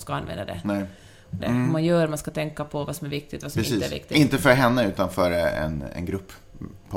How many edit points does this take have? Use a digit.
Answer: 1